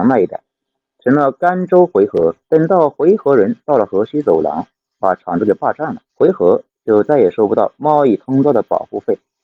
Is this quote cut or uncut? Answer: cut